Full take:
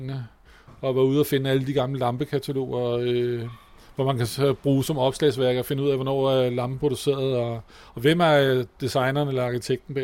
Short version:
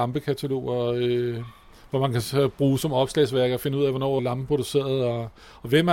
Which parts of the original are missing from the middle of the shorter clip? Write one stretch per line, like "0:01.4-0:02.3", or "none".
0:06.2-0:06.5